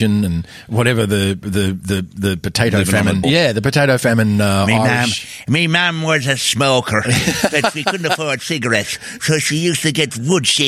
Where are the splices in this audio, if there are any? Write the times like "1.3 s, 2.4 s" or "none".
3.2 s